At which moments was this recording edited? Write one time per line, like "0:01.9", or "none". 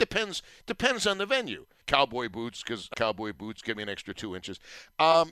0:01.8
0:02.9